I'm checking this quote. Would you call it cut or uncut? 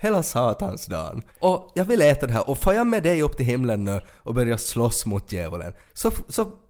cut